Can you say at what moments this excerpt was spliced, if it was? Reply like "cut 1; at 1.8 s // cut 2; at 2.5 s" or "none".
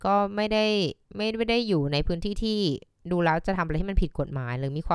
cut 1; at 1.0 s